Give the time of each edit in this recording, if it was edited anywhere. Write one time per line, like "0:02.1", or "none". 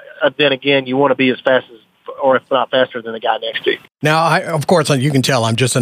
none